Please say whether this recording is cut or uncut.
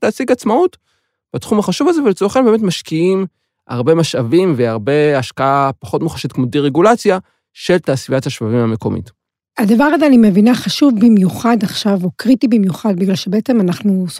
uncut